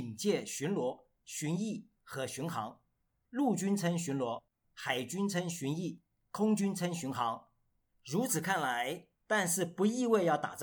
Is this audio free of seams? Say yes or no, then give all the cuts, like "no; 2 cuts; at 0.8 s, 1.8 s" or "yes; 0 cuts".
no; 2 cuts; at 7.9 s, 9.1 s